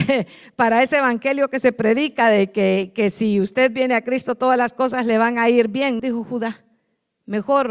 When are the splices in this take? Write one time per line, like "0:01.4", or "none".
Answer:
0:06.0

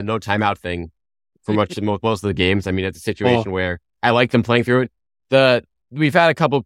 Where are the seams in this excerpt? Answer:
none

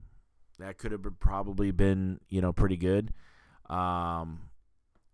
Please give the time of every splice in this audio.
none

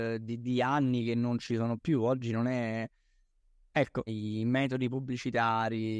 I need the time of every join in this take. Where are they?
0:04.1

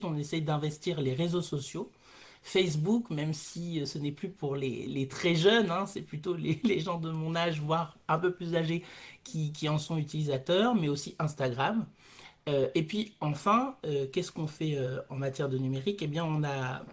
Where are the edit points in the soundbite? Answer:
none

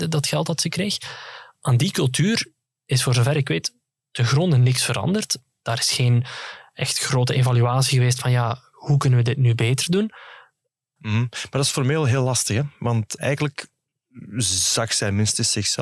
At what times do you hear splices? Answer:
0:11.0
0:13.2

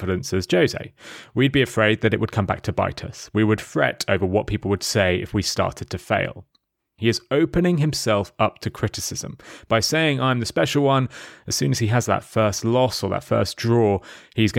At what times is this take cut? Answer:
0:07.0

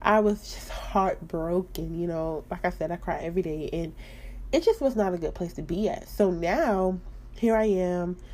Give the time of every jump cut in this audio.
none

